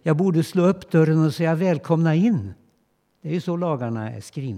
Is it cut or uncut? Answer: cut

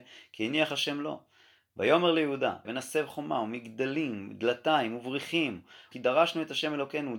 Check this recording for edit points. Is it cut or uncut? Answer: cut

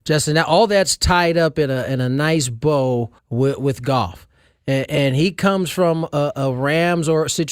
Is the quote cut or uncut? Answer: cut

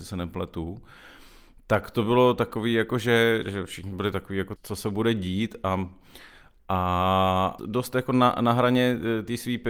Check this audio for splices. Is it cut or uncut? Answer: cut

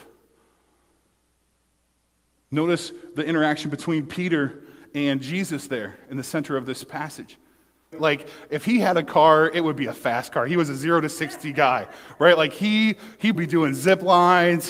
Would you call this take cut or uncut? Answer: cut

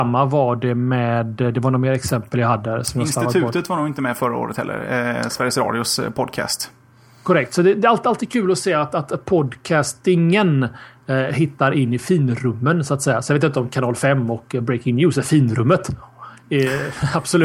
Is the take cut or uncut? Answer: uncut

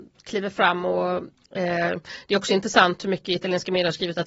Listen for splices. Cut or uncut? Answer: cut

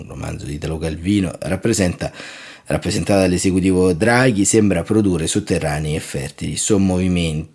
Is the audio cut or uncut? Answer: uncut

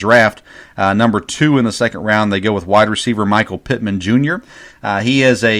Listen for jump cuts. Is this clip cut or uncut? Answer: uncut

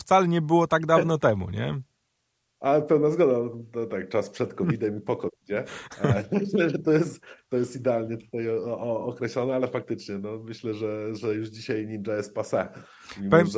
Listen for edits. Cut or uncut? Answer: uncut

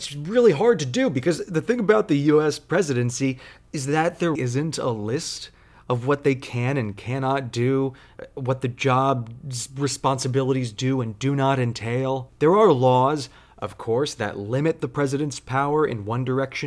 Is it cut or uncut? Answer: cut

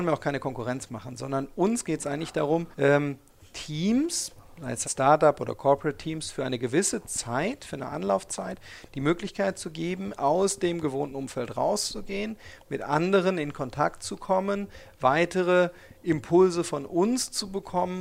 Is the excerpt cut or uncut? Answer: cut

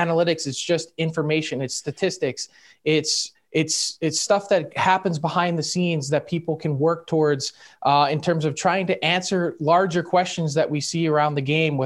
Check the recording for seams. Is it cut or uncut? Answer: cut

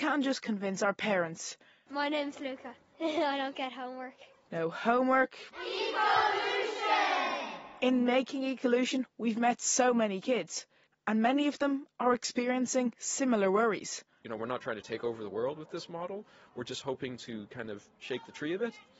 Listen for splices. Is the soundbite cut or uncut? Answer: cut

